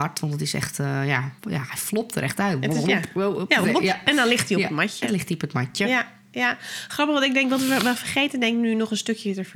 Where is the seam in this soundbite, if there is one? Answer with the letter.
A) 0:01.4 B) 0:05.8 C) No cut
A